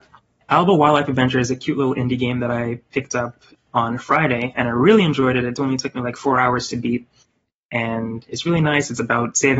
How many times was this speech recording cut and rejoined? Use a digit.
0